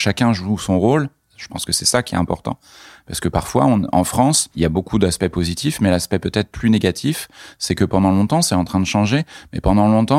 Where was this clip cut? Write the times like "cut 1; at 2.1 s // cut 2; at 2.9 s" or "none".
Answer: none

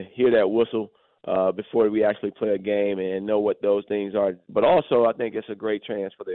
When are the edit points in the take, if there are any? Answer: cut 1; at 4.5 s

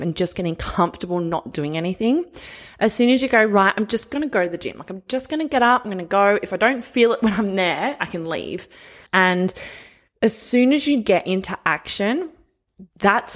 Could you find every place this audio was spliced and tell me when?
cut 1; at 9.1 s

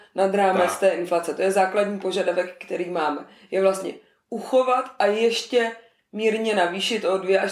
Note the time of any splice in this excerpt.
none

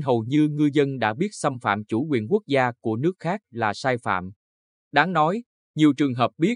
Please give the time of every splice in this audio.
none

